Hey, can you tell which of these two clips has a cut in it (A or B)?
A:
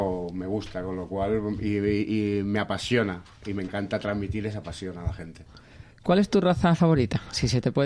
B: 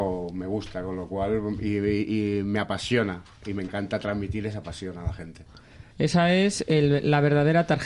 B